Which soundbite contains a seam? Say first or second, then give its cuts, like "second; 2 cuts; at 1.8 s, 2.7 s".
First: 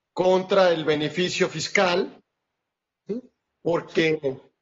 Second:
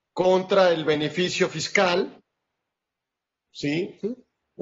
first; 1 cut; at 3.1 s